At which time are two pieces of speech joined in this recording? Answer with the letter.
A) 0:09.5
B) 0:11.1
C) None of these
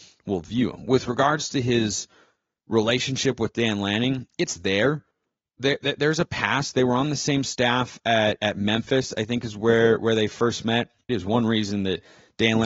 B